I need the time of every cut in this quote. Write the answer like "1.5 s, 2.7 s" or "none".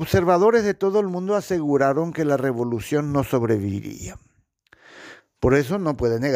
5.2 s